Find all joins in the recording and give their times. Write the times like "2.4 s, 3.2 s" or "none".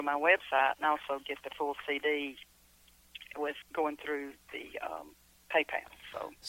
3.6 s